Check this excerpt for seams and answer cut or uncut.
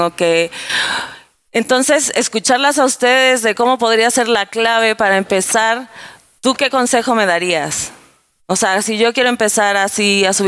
uncut